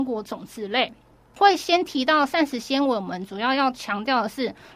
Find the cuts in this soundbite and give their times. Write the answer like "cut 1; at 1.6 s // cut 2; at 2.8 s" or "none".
cut 1; at 1.3 s